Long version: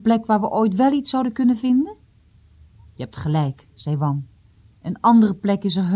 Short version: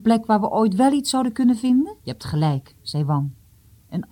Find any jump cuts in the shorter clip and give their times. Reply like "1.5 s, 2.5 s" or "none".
2.0 s